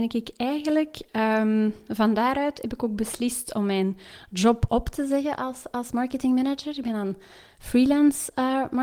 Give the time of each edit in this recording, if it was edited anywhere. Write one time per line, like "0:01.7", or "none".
none